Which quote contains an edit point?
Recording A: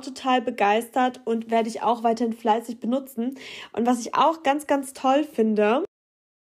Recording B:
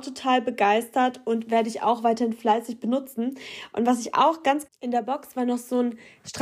B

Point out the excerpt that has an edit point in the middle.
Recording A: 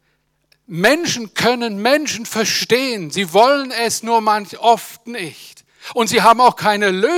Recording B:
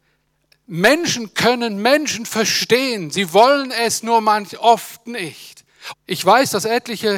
B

